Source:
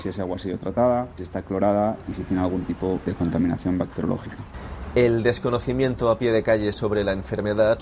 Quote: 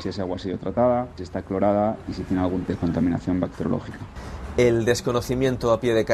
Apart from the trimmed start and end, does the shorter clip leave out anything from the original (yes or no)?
yes